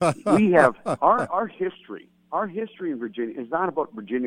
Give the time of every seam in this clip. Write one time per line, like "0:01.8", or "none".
none

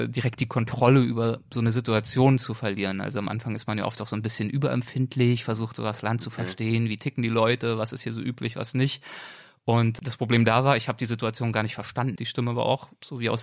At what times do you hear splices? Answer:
0:12.2

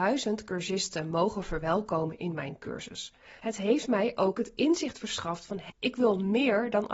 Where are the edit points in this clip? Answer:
0:03.4
0:05.7

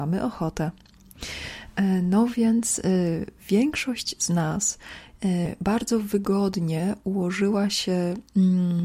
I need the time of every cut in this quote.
none

